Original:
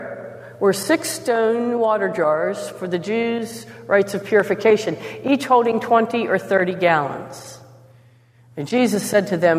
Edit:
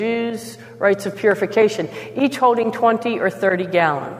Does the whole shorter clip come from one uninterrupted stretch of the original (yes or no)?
yes